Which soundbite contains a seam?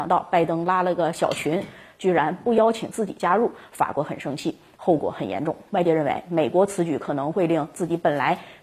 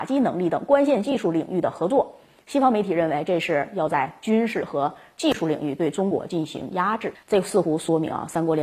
second; 1 cut; at 7.2 s

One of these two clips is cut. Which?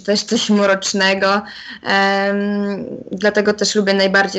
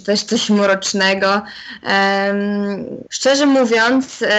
second; 1 cut; at 3.0 s

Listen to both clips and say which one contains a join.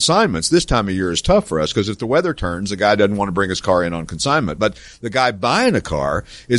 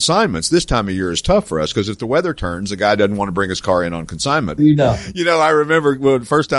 second; 1 cut; at 4.6 s

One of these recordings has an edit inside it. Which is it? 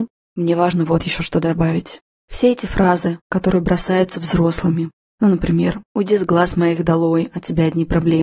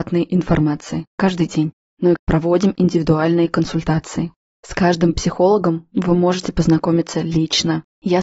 second; 1 cut; at 2.2 s

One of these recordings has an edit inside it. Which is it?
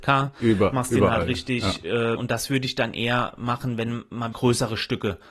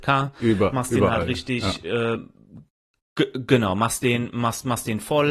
first; 2 cuts; at 2.2 s, 4.3 s

